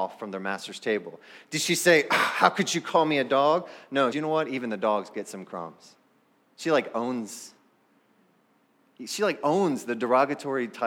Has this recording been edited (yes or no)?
yes